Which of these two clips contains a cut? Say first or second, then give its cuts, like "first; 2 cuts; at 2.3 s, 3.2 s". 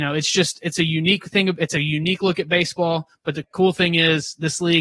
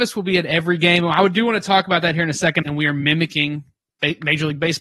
second; 1 cut; at 2.6 s